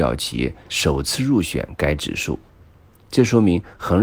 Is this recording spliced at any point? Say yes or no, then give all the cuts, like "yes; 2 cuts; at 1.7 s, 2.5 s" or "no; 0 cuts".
no; 0 cuts